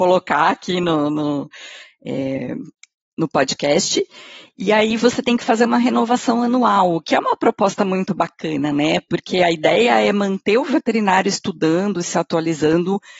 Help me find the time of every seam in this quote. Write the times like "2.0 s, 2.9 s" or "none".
none